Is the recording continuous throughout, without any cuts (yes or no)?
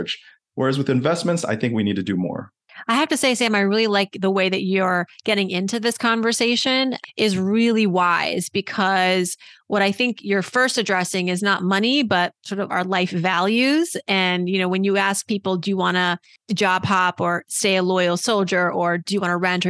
yes